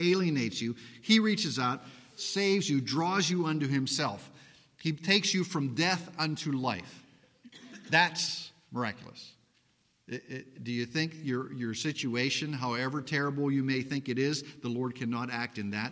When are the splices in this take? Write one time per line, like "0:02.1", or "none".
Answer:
none